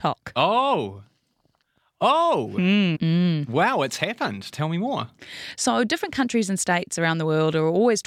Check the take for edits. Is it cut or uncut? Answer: cut